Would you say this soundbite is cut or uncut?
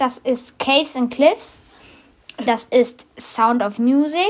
cut